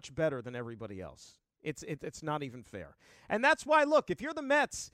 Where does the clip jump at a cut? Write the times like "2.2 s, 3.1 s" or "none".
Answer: none